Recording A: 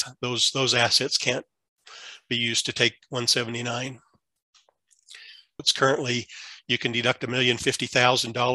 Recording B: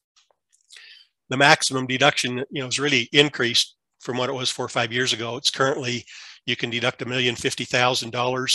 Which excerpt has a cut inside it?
A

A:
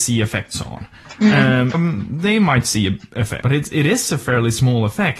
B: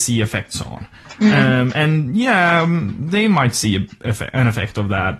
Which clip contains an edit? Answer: A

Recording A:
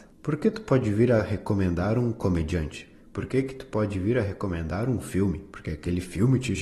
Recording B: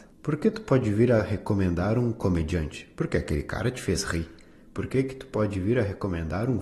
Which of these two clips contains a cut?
A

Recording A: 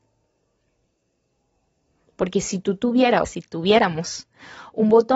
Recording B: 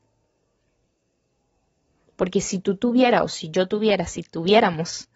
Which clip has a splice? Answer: A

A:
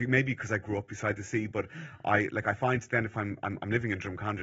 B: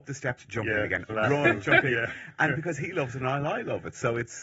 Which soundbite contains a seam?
B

